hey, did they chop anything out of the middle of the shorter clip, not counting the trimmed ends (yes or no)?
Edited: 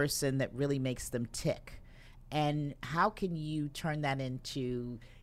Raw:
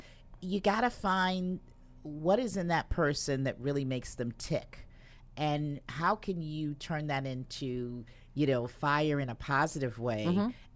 no